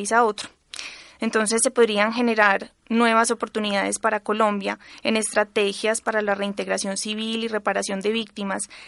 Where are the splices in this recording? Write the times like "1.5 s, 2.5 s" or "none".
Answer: none